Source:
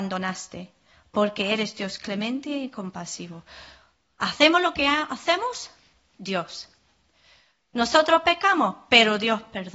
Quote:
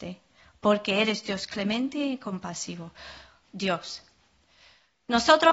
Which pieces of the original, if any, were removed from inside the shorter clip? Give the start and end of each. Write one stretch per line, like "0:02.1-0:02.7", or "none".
0:03.9-0:06.1